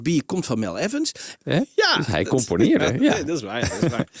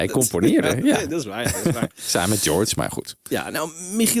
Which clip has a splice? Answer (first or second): first